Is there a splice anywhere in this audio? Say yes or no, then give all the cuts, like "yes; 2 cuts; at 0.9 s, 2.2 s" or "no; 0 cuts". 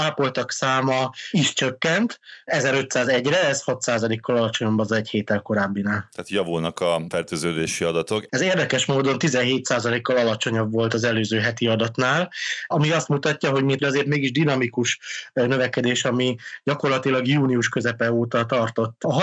yes; 2 cuts; at 8.3 s, 13.8 s